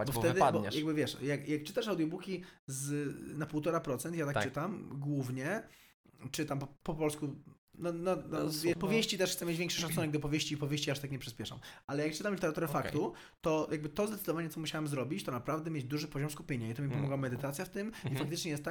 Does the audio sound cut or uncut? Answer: cut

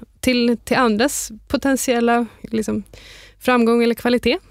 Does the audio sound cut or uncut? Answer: uncut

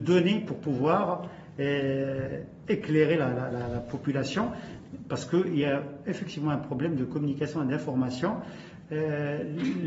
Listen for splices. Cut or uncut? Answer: uncut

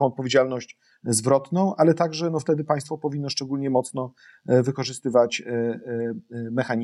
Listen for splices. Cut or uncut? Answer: uncut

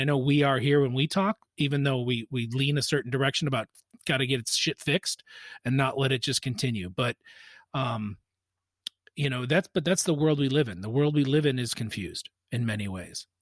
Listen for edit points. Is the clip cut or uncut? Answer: uncut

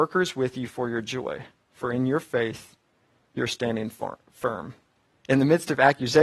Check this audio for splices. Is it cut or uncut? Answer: cut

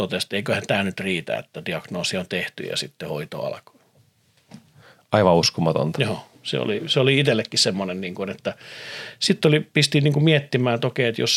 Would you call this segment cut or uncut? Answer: uncut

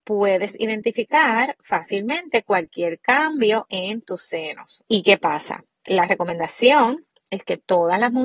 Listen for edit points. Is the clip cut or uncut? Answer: cut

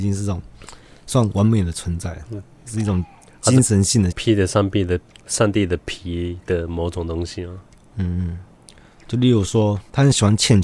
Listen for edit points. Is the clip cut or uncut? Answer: cut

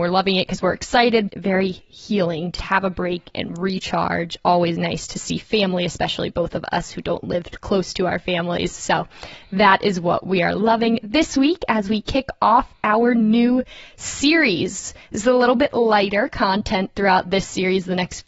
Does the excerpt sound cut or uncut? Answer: cut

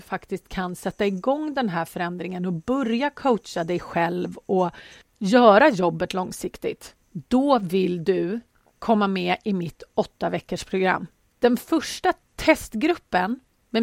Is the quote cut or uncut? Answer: uncut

